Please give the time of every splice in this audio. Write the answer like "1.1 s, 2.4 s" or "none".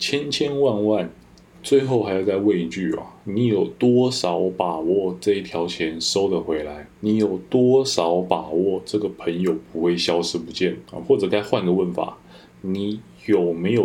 1.4 s, 6.9 s, 10.9 s